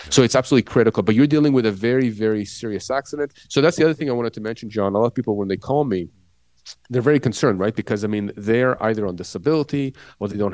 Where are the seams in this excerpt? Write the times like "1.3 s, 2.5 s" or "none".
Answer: 3.3 s